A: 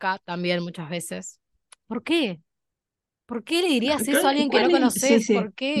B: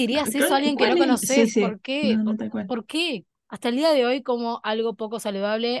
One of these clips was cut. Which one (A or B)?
B